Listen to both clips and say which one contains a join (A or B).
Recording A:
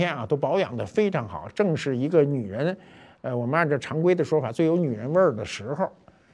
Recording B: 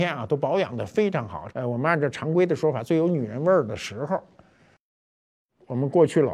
B